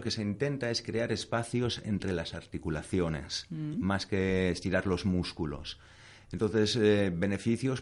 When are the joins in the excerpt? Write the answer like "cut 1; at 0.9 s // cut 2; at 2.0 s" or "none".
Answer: none